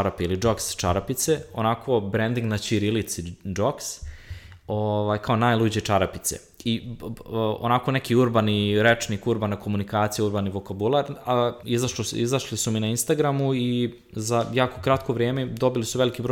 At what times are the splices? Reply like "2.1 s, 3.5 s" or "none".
11.6 s